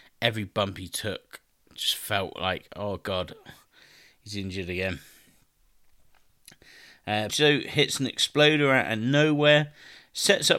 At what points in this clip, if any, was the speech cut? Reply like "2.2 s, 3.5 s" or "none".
7.3 s